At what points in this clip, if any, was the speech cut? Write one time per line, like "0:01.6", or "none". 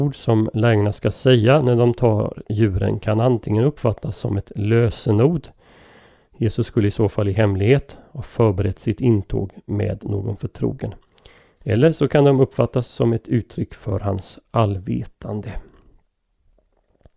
none